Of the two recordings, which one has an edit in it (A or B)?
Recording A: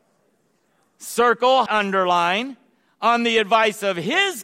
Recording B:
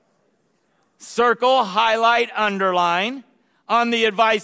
A